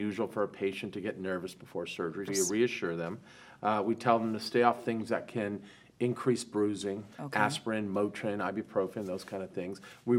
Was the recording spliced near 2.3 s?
yes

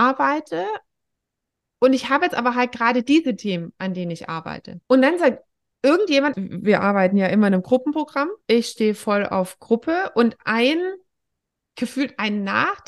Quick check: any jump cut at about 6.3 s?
yes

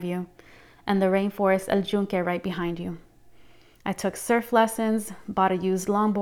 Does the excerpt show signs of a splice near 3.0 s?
no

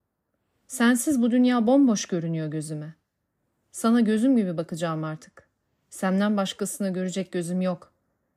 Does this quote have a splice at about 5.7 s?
no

